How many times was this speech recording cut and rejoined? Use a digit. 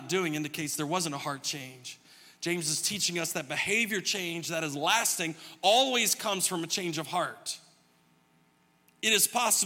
0